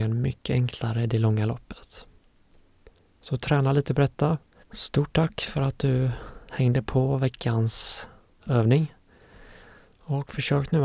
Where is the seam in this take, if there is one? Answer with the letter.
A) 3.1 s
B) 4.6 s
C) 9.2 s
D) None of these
B